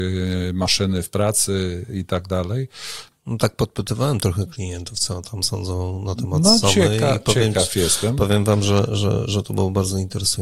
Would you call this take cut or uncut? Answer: cut